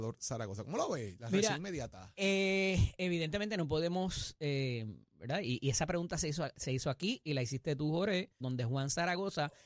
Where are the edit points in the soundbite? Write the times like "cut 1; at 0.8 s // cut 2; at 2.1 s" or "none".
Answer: cut 1; at 8.4 s